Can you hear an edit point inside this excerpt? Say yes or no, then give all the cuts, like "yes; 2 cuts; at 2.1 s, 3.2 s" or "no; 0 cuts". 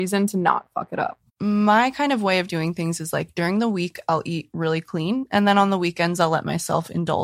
yes; 1 cut; at 1.3 s